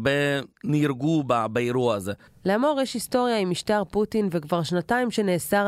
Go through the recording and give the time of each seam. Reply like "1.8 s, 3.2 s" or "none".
2.3 s